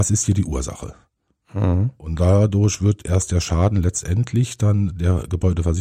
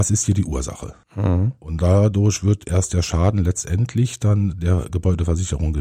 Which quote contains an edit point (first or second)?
second